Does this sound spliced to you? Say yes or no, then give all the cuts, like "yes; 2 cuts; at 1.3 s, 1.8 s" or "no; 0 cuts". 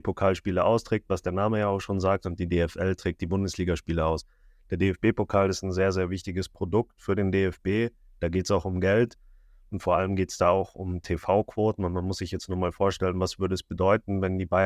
no; 0 cuts